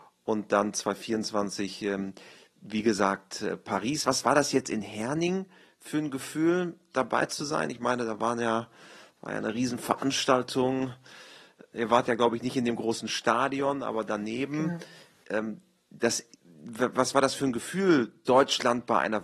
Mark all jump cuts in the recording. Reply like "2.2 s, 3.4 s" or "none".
none

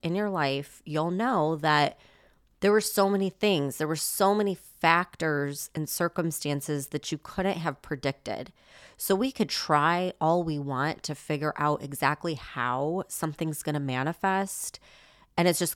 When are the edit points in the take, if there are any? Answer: none

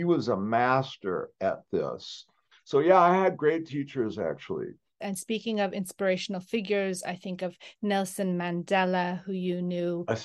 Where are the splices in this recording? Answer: none

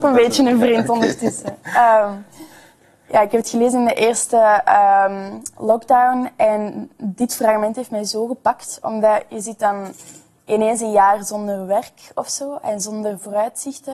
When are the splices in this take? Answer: none

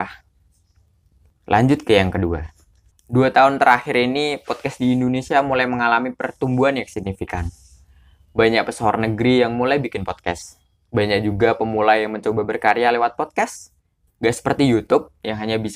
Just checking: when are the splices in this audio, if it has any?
2.9 s, 14.1 s

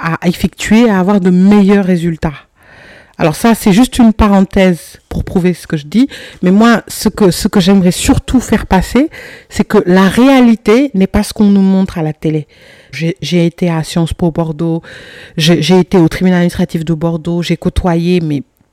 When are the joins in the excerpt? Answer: 12.9 s

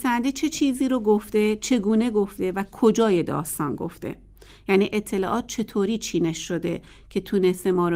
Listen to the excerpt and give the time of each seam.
none

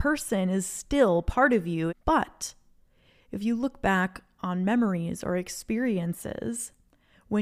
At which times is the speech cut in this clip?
1.9 s

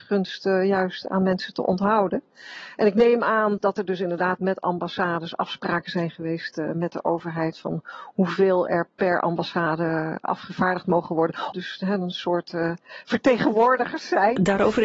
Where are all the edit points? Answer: 3.6 s, 11.5 s

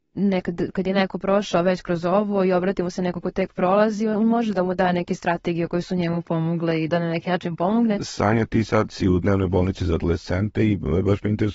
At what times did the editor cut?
6.9 s, 8.0 s

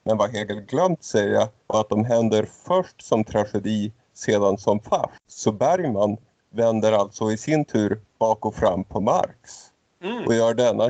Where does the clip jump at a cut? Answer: 5.2 s

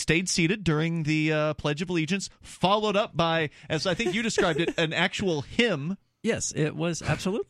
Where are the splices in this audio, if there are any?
none

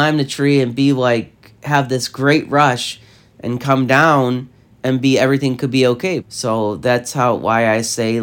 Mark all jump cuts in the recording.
6.2 s

